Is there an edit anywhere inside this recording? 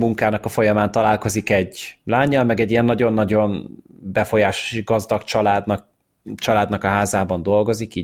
no; 0 cuts

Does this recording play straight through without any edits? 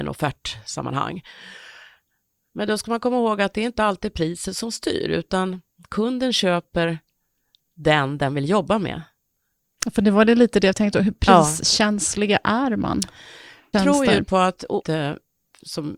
no; 2 cuts; at 13.7 s, 14.8 s

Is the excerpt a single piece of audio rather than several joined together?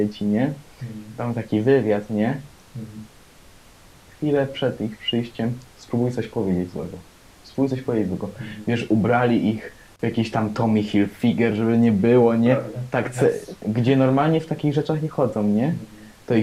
yes; 0 cuts

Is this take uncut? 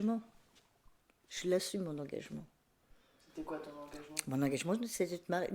yes; 0 cuts

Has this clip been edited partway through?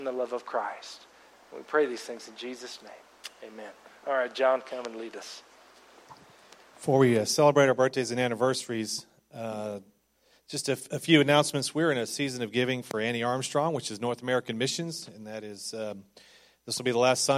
no; 0 cuts

